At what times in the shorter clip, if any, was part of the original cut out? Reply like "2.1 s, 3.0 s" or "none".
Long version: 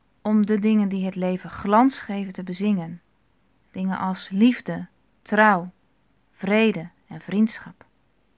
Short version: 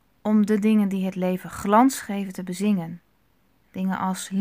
none